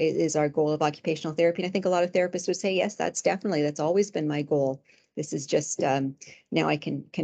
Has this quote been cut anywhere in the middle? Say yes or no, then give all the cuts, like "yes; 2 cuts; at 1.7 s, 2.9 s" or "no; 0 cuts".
no; 0 cuts